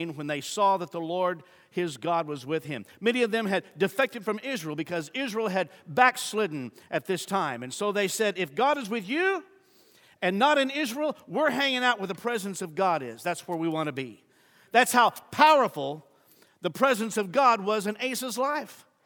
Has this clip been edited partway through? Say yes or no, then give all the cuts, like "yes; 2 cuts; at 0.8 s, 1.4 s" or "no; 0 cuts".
no; 0 cuts